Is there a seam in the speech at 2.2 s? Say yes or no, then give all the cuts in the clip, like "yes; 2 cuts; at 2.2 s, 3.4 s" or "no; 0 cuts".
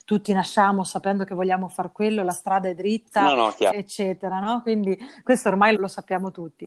no; 2 cuts; at 3.7 s, 5.8 s